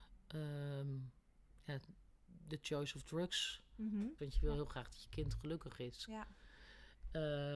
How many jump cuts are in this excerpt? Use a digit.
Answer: 1